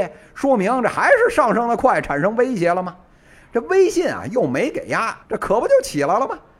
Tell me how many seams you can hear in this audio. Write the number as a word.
two